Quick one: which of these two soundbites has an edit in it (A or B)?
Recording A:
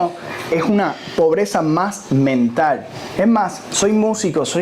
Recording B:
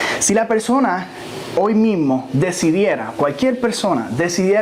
A